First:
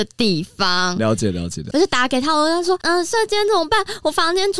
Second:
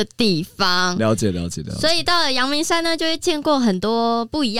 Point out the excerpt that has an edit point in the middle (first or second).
first